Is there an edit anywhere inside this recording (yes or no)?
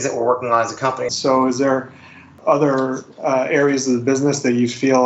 yes